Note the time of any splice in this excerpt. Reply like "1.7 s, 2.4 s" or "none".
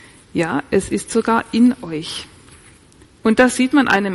3.1 s

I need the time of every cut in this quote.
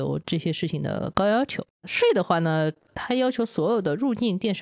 1.7 s, 2.9 s

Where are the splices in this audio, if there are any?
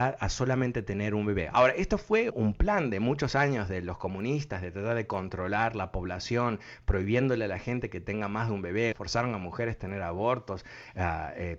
2.3 s, 8.9 s

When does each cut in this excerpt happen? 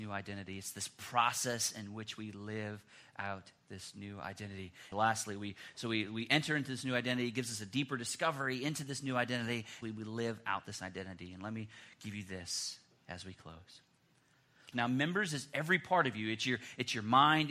4.9 s, 9.8 s, 14.7 s

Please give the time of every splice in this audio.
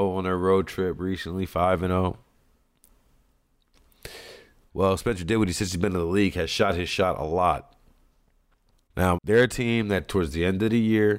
4.7 s, 9.2 s

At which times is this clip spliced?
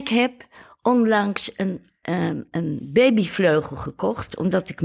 none

